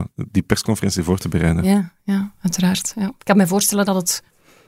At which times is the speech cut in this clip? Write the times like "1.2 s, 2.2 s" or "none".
none